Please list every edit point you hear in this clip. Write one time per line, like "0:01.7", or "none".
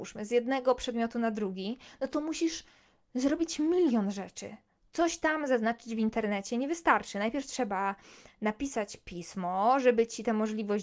none